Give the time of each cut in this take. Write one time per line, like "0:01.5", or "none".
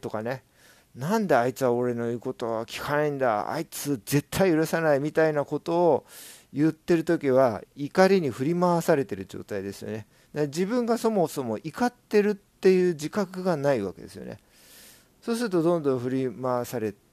none